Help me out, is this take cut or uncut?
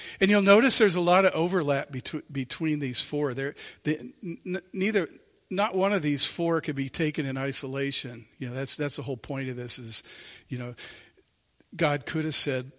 uncut